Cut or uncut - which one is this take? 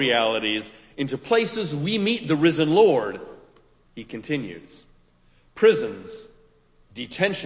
cut